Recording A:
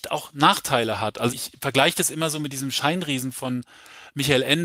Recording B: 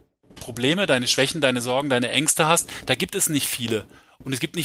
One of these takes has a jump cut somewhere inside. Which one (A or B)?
A